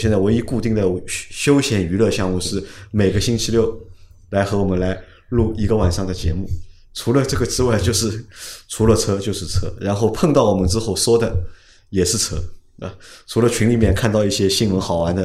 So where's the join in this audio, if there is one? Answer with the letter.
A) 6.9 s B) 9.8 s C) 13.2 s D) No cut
D